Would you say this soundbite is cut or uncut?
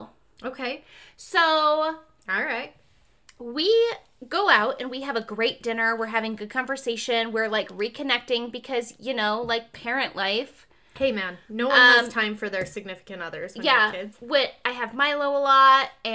uncut